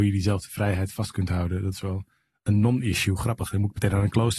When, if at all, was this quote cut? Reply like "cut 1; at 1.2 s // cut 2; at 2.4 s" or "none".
none